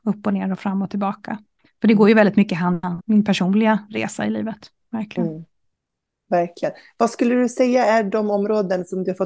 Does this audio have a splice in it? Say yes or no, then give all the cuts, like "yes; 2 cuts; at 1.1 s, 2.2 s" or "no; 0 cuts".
yes; 1 cut; at 3.0 s